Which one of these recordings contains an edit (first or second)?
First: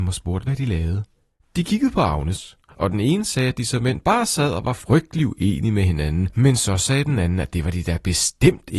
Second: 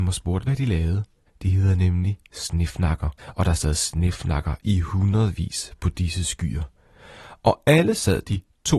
second